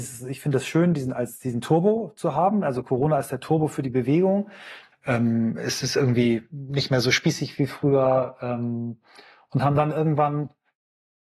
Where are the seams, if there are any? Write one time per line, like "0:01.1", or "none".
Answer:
0:04.9